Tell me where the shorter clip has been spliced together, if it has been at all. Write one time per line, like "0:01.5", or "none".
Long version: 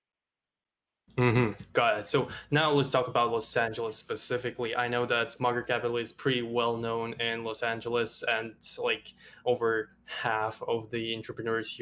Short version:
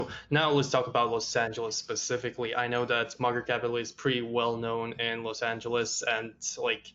none